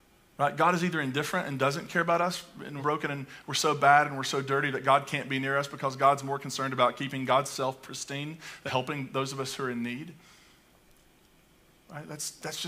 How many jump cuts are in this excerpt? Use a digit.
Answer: 2